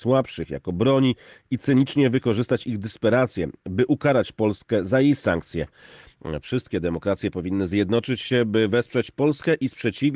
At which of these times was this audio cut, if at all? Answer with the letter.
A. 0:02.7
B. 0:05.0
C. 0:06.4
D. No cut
C